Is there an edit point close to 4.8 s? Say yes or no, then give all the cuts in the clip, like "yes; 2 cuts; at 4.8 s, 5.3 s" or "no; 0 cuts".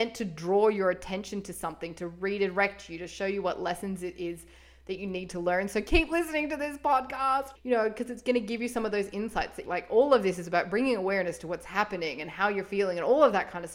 no; 2 cuts; at 7.6 s, 9.7 s